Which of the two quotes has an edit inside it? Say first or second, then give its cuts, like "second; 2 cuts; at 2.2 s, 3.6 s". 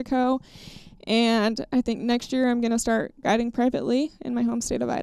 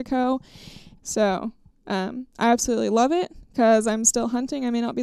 second; 1 cut; at 1.0 s